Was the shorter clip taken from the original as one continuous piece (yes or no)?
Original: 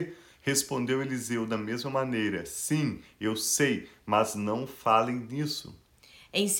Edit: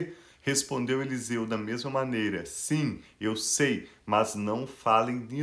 yes